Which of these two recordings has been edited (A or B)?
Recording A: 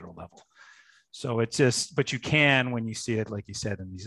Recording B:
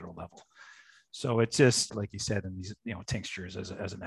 B